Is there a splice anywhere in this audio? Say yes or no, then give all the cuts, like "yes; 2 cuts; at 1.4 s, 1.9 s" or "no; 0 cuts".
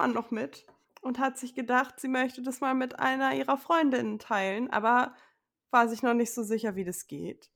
no; 0 cuts